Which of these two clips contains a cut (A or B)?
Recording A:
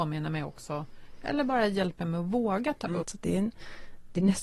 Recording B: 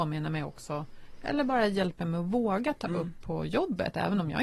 A